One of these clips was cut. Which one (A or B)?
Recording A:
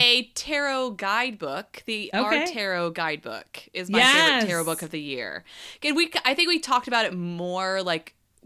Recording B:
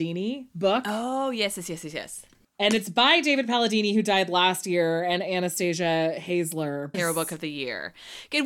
B